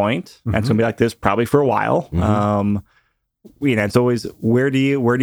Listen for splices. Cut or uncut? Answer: uncut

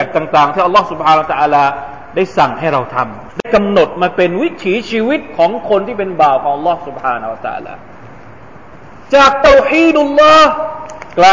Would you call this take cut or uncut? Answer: cut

